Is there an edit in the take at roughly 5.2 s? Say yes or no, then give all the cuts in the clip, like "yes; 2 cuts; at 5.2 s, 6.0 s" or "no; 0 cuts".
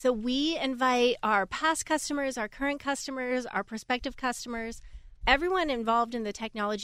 yes; 1 cut; at 5.2 s